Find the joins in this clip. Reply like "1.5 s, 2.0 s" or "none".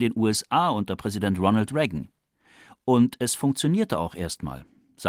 none